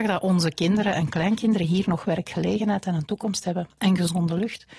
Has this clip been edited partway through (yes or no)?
no